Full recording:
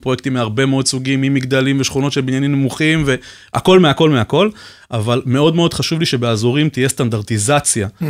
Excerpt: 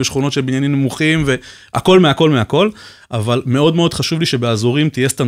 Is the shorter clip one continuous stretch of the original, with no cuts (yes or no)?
yes